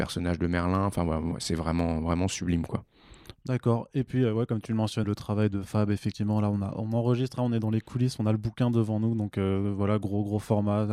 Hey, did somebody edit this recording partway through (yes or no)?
yes